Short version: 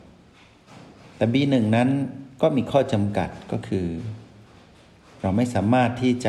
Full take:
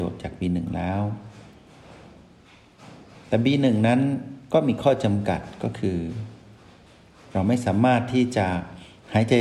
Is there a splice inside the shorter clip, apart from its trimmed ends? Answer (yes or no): no